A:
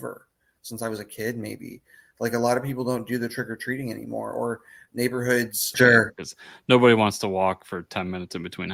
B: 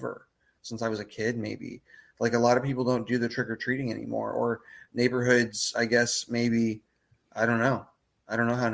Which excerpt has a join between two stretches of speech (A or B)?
A